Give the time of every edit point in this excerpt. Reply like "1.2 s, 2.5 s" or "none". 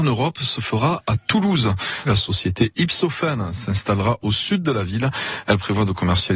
2.0 s